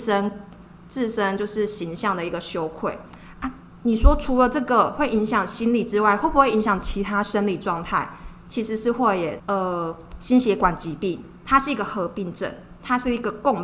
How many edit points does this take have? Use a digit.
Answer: 1